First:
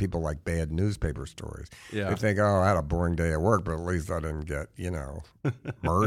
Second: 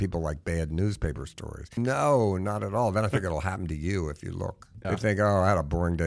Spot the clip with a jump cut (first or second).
second